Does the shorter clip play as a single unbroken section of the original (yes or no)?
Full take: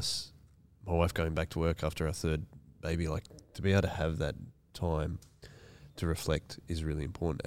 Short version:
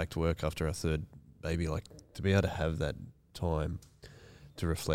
yes